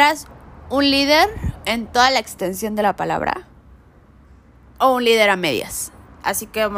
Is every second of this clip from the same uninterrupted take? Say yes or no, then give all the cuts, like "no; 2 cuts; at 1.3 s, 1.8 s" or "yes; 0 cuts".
yes; 0 cuts